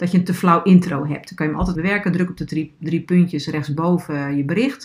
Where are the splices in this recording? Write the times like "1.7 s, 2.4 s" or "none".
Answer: 1.7 s